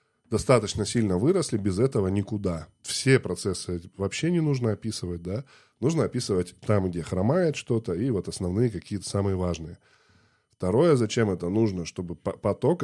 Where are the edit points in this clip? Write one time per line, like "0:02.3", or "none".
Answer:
0:02.8